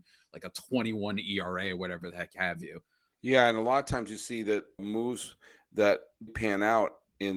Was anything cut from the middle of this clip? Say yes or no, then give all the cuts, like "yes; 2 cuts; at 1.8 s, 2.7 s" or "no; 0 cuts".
yes; 3 cuts; at 3.1 s, 4.8 s, 6.3 s